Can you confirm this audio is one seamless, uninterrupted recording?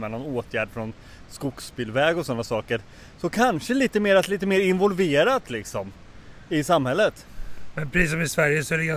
yes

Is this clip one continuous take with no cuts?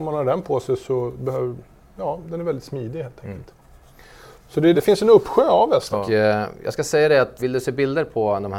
no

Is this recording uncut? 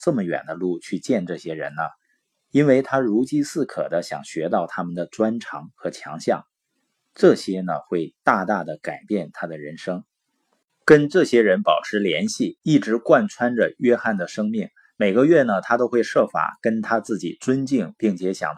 yes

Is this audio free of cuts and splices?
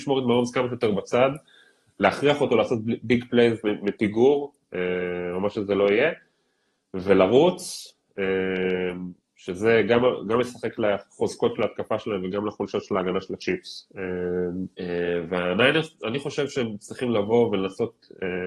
no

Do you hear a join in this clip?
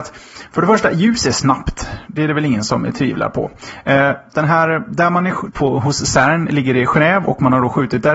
yes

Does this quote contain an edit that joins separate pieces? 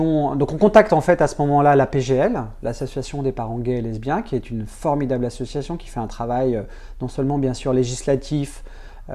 no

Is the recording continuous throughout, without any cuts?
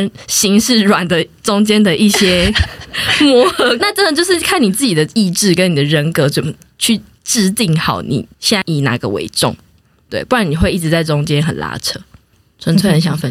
no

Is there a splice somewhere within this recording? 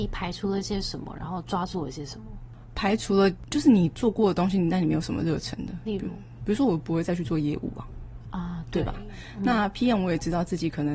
no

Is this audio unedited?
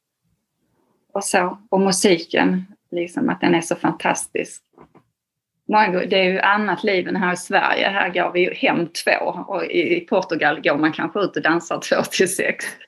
yes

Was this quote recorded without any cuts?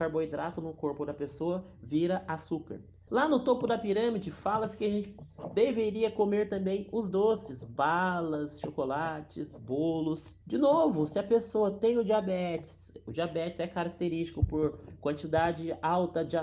no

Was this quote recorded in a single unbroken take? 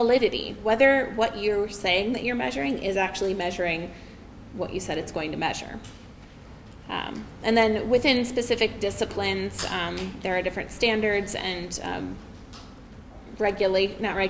yes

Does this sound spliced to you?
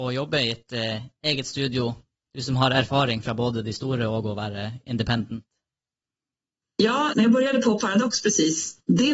yes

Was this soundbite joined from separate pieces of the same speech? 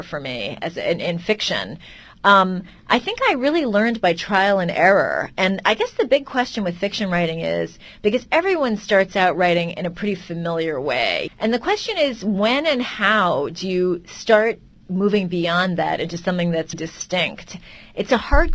yes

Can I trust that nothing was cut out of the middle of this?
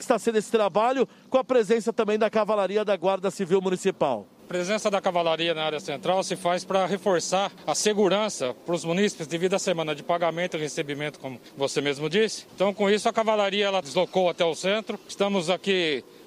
no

